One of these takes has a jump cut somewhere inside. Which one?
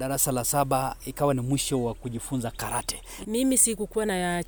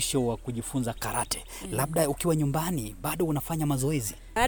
first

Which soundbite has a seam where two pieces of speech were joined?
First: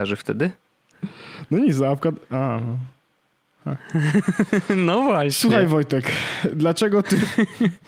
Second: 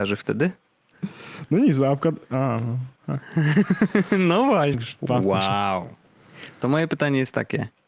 second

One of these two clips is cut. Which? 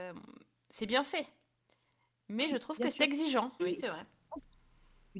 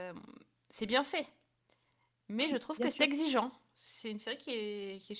first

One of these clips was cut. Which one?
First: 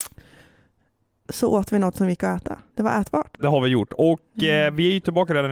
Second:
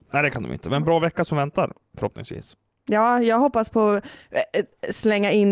first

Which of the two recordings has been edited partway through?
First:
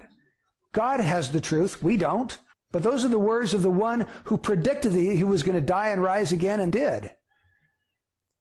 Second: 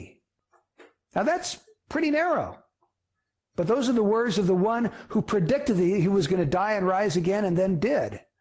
first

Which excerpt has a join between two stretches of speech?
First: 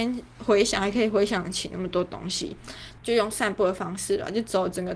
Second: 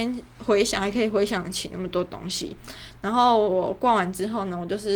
first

